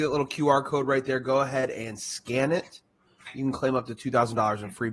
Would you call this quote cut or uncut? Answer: uncut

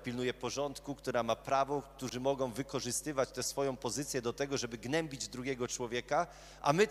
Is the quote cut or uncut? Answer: uncut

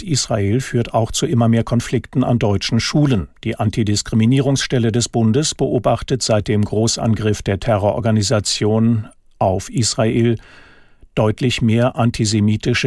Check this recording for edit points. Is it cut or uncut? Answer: uncut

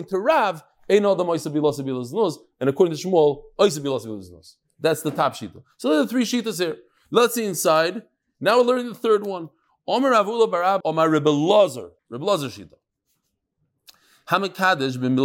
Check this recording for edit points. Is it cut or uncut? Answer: cut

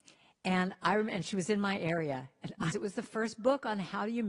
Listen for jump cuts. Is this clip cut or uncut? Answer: cut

